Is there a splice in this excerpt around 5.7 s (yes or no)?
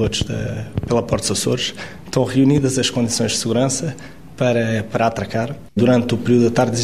yes